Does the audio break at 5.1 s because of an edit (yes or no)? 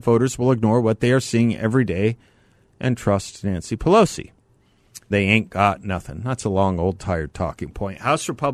yes